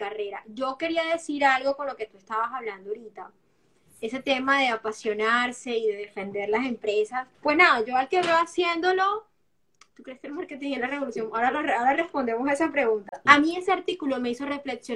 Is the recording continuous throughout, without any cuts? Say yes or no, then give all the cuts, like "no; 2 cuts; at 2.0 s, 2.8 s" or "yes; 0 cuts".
no; 2 cuts; at 7.3 s, 13.3 s